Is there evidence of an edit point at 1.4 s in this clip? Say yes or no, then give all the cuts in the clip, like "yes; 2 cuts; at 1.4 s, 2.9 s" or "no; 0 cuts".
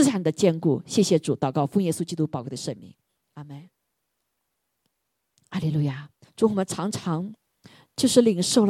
no; 1 cut; at 6.2 s